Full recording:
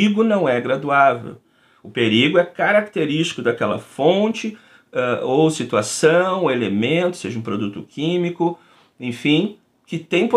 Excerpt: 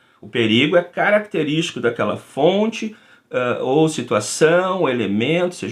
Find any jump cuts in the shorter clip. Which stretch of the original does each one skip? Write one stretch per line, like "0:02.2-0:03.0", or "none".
none